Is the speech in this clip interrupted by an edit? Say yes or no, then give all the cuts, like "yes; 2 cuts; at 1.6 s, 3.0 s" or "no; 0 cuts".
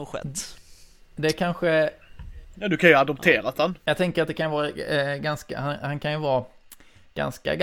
no; 0 cuts